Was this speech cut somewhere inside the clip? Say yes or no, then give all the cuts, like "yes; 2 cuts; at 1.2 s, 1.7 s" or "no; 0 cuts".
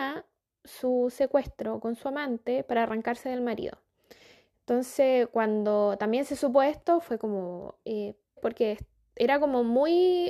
yes; 1 cut; at 8.4 s